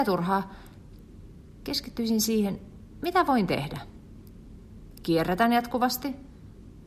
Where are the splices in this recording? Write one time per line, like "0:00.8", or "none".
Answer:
none